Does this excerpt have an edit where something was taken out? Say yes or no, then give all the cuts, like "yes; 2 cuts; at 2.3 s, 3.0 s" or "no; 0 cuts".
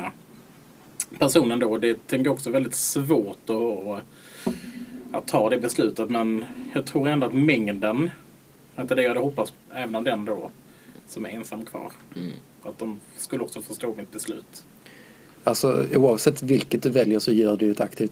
yes; 2 cuts; at 9.5 s, 15.4 s